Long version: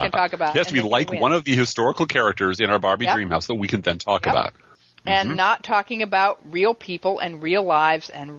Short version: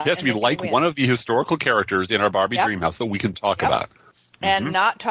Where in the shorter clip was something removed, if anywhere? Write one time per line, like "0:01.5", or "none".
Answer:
0:03.3